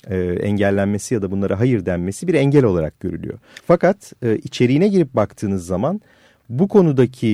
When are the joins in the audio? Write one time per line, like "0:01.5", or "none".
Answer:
0:03.6